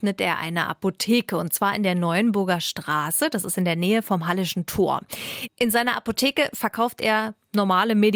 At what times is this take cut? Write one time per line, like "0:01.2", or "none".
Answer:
none